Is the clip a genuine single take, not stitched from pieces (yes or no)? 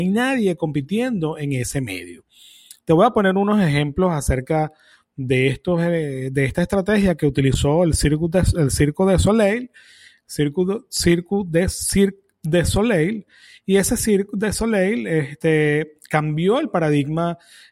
yes